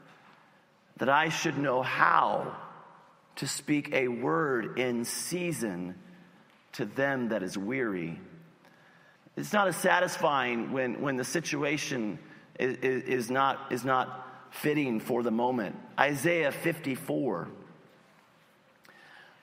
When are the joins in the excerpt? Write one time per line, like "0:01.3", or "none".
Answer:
0:09.2